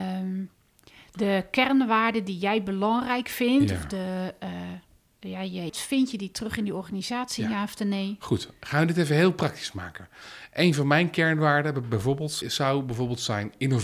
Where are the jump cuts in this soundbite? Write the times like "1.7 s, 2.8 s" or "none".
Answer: 5.7 s, 12.4 s

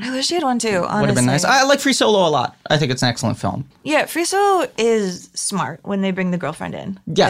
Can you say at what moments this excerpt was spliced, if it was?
3.7 s

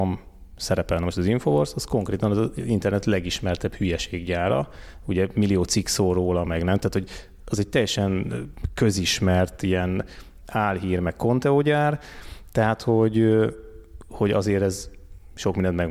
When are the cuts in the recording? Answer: none

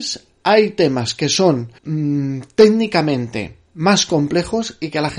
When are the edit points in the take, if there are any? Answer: 1.8 s

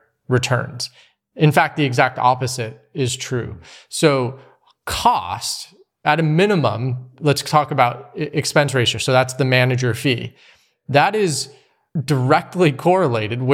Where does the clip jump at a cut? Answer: none

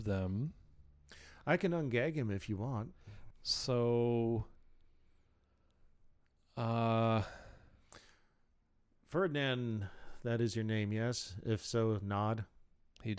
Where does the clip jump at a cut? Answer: 3.3 s

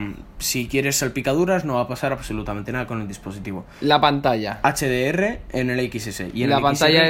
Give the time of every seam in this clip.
none

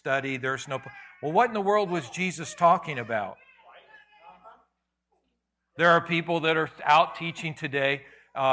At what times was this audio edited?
none

